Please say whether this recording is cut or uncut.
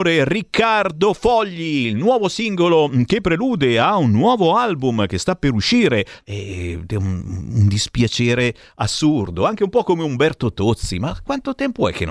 cut